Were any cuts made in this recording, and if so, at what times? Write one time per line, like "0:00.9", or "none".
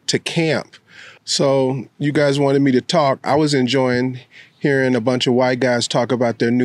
0:01.2